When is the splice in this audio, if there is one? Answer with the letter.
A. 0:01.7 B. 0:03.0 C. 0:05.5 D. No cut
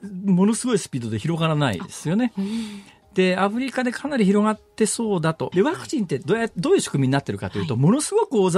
C